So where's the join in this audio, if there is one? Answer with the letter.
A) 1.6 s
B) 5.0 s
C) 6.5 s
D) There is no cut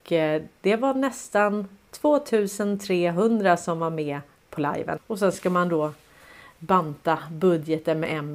B